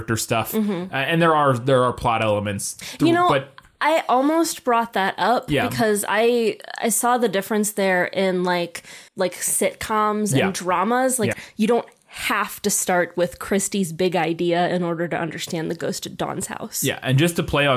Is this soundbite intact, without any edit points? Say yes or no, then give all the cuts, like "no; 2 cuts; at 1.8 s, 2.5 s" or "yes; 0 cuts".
no; 2 cuts; at 9.1 s, 11.3 s